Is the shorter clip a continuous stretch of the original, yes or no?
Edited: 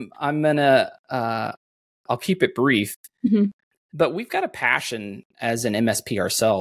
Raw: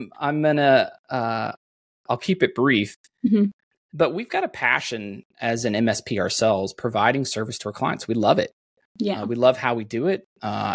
yes